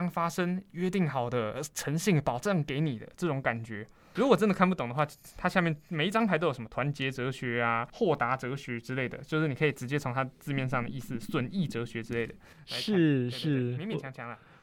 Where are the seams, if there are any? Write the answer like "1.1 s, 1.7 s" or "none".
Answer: 4.2 s